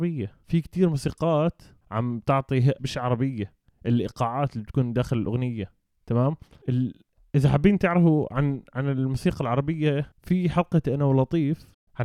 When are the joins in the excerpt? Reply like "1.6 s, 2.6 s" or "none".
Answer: 2.8 s